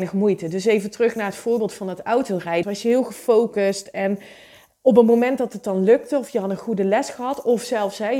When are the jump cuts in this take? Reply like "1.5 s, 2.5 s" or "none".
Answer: 2.6 s